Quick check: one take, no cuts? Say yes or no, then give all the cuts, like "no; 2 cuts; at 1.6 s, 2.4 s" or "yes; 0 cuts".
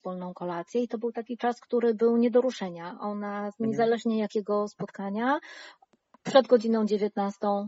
yes; 0 cuts